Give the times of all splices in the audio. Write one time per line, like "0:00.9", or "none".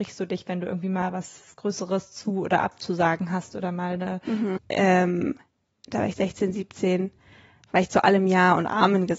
0:04.6